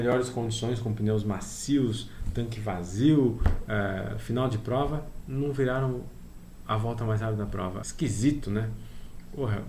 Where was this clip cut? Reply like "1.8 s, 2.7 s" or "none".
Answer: 7.8 s